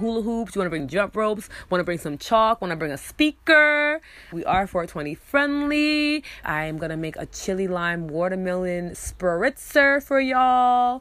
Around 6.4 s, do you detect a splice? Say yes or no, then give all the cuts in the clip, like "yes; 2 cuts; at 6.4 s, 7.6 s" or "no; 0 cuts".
yes; 2 cuts; at 4.3 s, 6.4 s